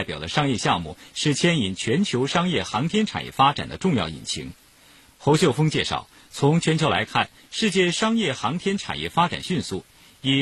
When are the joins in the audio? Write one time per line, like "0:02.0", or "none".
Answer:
0:05.1